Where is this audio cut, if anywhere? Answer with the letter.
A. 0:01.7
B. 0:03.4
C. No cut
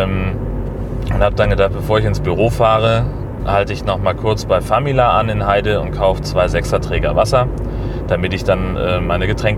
B